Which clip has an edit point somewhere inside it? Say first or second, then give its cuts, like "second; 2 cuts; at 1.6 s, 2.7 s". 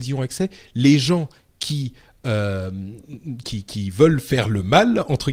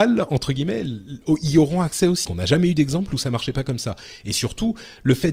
second; 1 cut; at 2.2 s